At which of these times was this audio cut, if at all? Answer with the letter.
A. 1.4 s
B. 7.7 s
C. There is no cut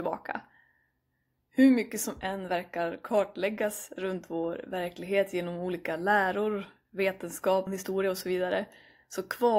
B